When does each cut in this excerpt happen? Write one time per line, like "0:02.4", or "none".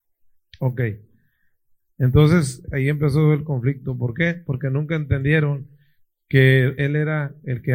0:01.9
0:06.8

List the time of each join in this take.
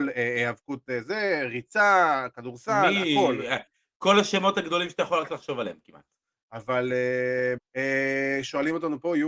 0:06.3
0:07.6

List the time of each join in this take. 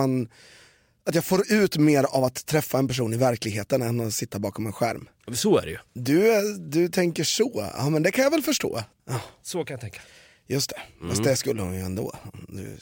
0:05.9
0:09.0

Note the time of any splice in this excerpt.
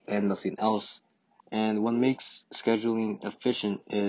0:01.4

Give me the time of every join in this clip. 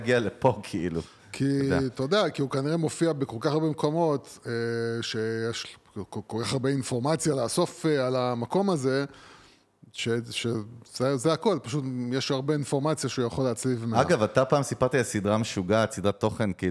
none

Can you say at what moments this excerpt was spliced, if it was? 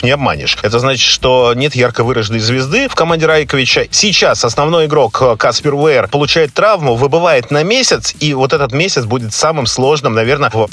0:03.9

